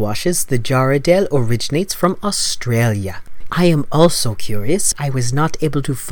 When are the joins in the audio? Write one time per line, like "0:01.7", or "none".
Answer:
0:03.5
0:04.9